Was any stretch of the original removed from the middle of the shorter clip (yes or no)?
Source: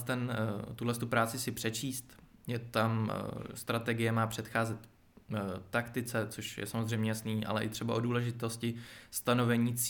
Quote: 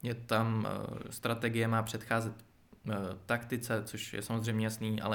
no